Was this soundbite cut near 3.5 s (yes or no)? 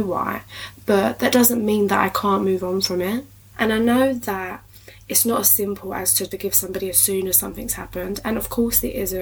yes